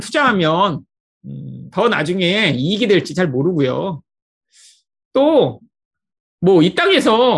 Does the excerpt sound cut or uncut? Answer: uncut